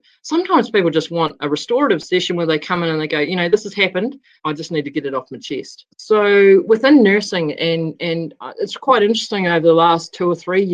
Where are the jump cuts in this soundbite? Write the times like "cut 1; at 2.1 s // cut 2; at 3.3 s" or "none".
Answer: cut 1; at 4.4 s